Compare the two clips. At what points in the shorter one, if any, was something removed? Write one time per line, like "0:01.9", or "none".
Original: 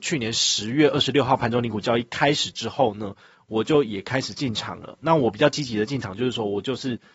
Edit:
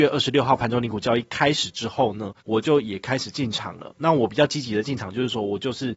0:02.4